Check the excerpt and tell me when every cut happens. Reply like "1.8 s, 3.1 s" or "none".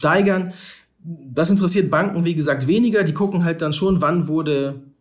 none